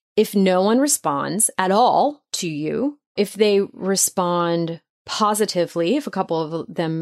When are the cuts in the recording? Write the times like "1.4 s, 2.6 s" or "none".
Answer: 3.2 s